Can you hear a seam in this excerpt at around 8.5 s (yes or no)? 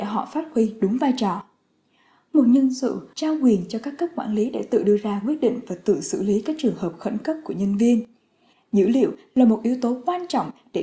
yes